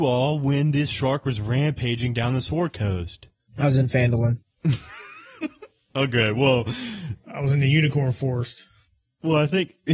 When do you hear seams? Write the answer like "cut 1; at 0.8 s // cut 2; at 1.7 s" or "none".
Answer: none